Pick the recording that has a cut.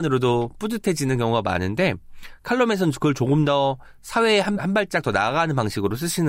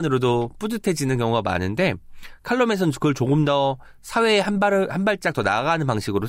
first; 1 cut; at 4.6 s

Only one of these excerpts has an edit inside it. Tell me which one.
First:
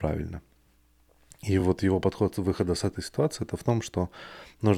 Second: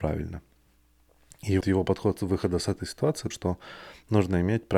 second; 2 cuts; at 1.6 s, 3.3 s

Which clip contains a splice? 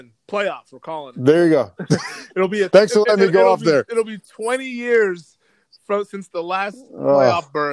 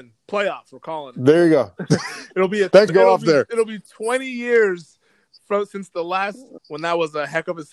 second; 2 cuts; at 2.9 s, 6.6 s

